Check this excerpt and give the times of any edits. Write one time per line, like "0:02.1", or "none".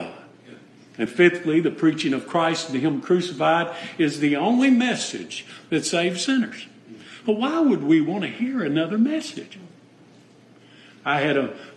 0:01.1